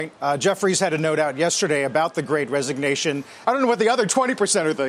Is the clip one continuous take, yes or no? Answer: no